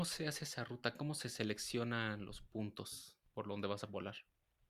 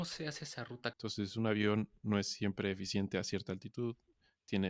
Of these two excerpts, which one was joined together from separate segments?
second; 1 cut; at 0.9 s

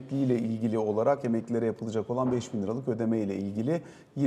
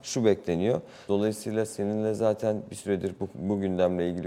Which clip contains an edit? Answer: second; 1 cut; at 1.1 s

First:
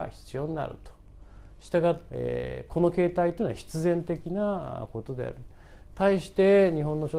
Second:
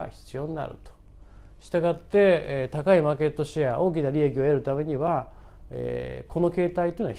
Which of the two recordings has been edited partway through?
first; 1 cut; at 2.1 s

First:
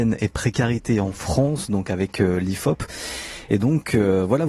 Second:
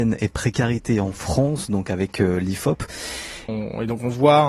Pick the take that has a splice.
second; 1 cut; at 3.5 s

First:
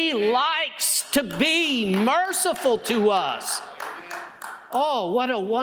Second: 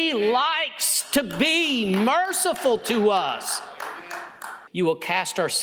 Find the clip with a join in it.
second; 1 cut; at 4.7 s

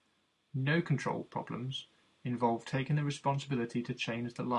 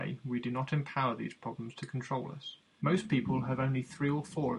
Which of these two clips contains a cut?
second; 1 cut; at 2.8 s

